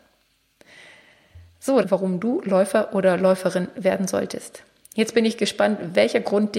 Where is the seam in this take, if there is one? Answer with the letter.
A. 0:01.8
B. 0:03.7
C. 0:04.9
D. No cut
A